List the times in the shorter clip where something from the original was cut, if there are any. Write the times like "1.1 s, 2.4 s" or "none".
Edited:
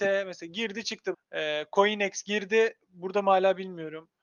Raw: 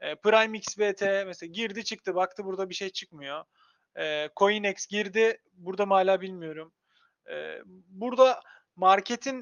1.1 s